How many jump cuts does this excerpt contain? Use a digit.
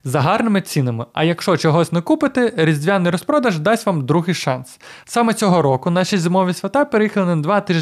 0